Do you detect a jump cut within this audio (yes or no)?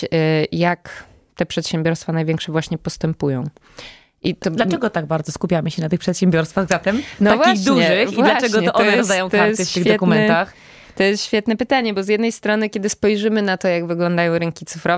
no